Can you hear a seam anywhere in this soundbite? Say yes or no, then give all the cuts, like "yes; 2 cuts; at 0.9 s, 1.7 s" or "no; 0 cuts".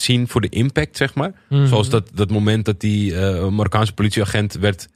no; 0 cuts